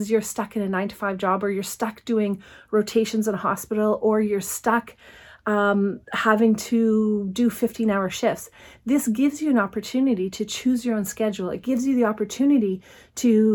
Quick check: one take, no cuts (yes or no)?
yes